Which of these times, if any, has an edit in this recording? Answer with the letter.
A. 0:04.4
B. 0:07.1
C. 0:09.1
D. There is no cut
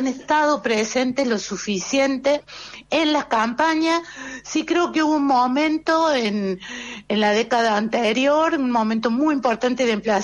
D